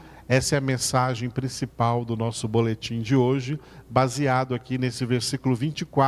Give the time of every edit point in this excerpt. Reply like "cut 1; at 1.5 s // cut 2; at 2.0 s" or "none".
none